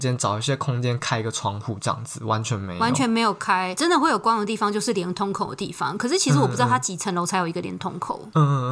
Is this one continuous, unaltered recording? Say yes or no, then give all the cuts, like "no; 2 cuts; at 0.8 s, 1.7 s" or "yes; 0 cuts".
yes; 0 cuts